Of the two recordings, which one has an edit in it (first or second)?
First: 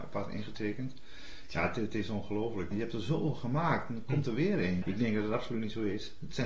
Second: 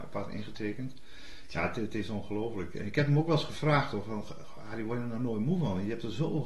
first